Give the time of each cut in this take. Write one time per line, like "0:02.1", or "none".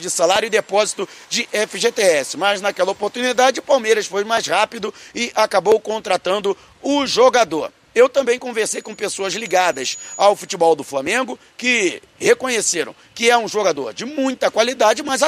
none